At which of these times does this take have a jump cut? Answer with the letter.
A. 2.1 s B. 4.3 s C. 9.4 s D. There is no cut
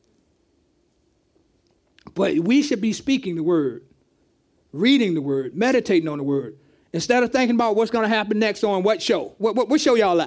D